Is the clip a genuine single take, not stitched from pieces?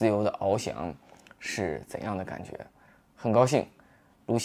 yes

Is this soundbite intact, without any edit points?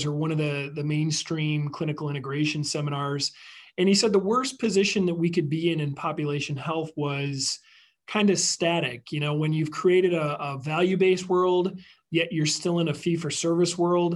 yes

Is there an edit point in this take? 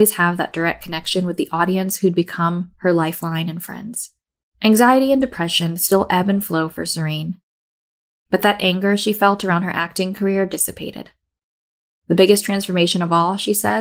yes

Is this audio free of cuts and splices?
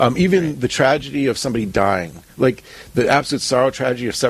yes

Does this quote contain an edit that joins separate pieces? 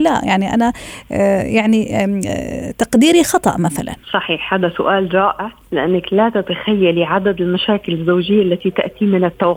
yes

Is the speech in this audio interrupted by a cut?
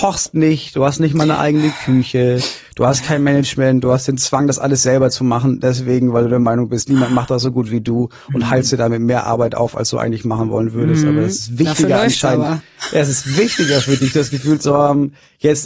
no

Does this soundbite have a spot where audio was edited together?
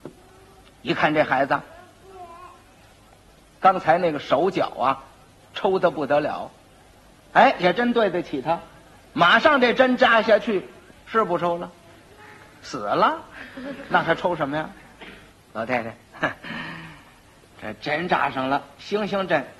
yes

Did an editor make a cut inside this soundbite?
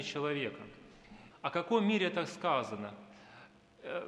yes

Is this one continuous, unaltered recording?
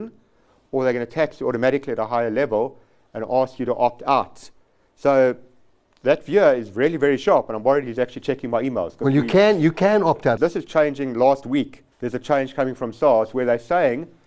no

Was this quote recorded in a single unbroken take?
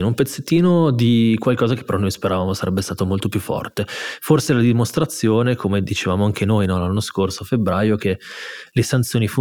yes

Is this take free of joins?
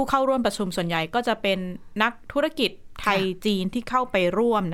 yes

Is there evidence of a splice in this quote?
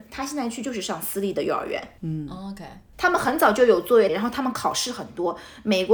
yes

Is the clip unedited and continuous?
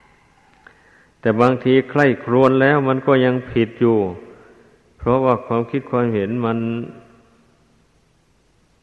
yes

